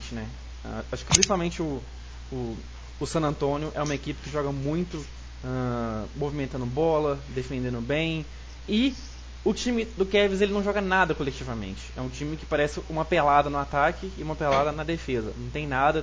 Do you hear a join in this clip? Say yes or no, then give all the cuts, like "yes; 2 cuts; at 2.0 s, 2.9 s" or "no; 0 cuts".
no; 0 cuts